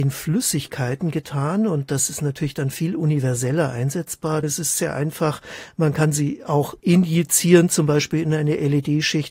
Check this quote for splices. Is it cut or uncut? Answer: cut